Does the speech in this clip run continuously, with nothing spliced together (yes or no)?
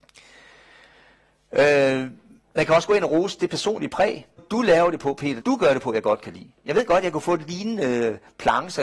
no